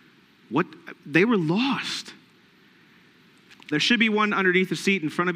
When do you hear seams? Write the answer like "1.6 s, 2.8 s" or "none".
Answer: 3.7 s